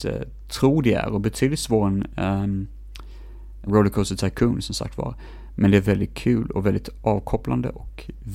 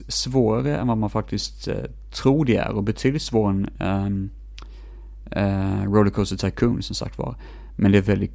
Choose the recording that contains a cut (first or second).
first